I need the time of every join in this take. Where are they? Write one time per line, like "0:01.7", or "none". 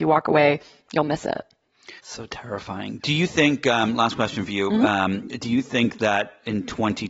0:02.0